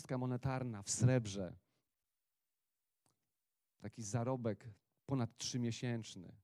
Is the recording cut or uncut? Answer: uncut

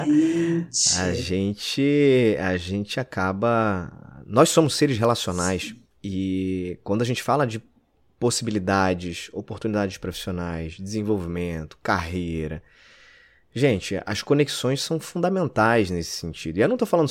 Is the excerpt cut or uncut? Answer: cut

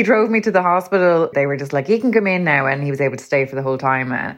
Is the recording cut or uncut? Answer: cut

